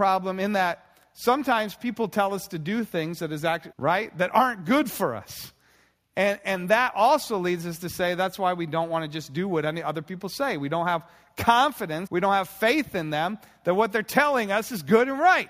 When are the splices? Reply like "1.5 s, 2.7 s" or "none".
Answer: 3.7 s, 12.1 s

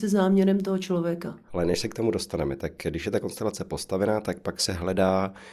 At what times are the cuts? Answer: 1.5 s

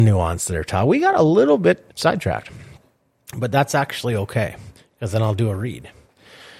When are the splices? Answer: 1.9 s

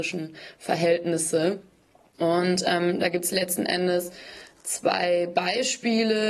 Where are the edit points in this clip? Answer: none

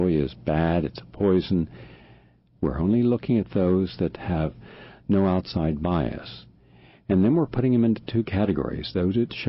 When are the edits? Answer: 2.6 s

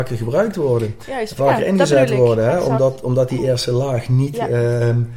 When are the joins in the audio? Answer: none

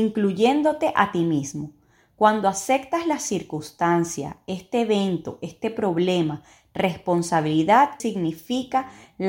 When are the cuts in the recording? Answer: 8.0 s

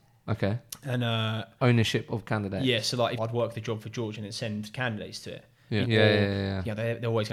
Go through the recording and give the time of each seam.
3.2 s, 5.8 s

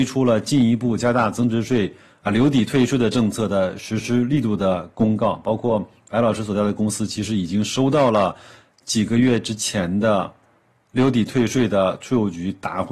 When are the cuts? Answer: none

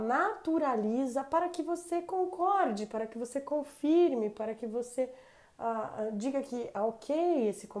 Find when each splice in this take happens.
none

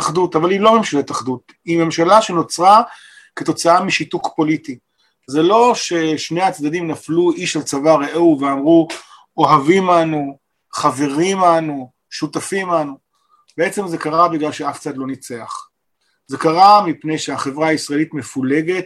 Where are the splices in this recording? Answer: none

